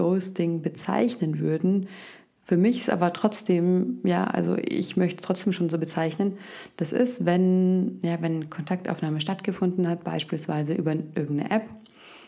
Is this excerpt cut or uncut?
uncut